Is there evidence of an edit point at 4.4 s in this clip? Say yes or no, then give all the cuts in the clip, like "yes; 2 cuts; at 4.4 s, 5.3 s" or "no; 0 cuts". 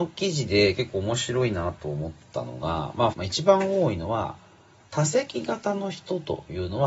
no; 1 cut; at 3.1 s